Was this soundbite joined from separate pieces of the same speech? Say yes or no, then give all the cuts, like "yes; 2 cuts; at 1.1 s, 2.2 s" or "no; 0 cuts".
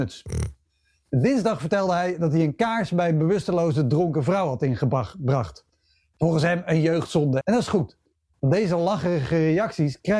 yes; 1 cut; at 7.4 s